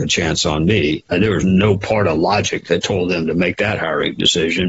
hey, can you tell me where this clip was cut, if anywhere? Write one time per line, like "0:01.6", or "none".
none